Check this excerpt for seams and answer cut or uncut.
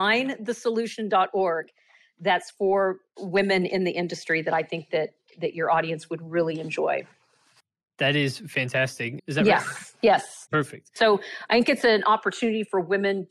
cut